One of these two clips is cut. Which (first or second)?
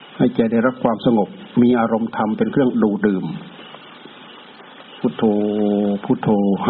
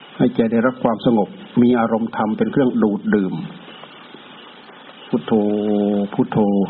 first